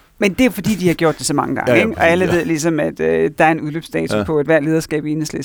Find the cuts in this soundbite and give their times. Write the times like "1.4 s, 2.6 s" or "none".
none